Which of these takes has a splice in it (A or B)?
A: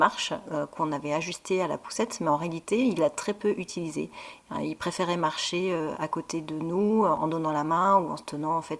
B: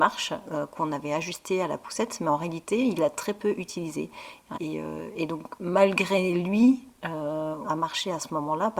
B